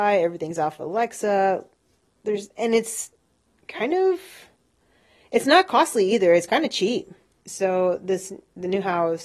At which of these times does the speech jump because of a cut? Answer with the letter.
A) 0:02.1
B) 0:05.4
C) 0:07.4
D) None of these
C